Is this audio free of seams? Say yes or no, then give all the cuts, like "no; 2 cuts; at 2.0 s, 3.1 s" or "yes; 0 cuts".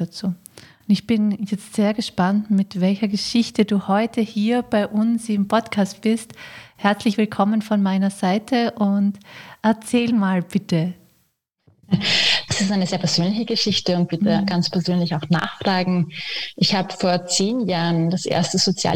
no; 1 cut; at 12.5 s